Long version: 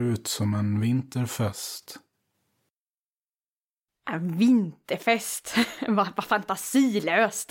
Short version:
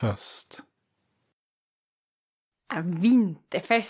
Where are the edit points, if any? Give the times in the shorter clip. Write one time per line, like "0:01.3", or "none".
none